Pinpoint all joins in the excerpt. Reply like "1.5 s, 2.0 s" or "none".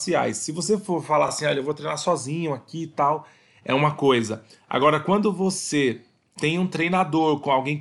none